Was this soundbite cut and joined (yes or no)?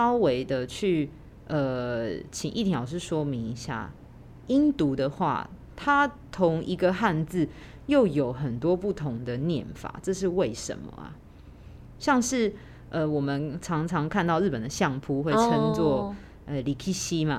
no